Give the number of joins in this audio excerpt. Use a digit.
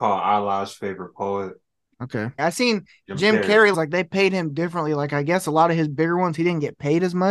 2